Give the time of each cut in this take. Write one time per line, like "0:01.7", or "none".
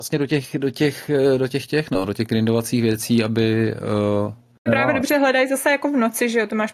0:04.7